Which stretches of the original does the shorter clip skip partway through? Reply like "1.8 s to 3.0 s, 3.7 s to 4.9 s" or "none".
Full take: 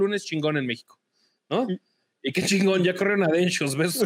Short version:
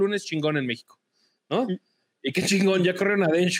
none